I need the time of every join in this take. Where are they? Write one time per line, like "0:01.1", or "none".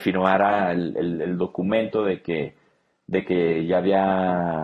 none